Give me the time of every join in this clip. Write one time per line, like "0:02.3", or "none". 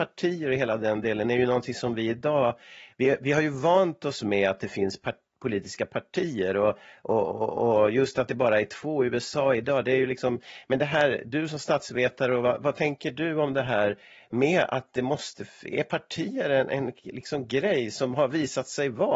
none